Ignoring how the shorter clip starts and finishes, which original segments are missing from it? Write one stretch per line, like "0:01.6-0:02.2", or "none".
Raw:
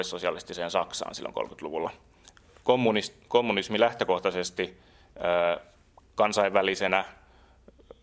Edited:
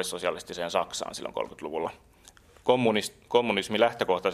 none

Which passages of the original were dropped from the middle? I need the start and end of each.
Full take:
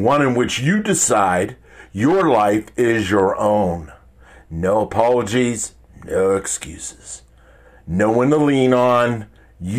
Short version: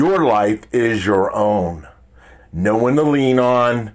0:04.4-0:07.7

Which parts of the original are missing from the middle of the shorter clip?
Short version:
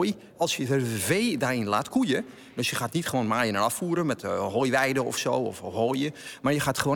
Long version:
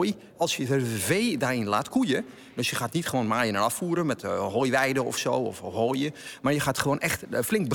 none

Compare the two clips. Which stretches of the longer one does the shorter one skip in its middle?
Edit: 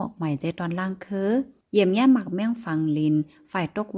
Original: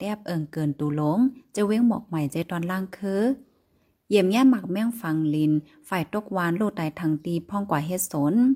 0:03.5-0:04.0

